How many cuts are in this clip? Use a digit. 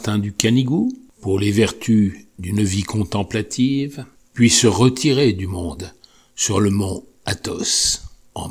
1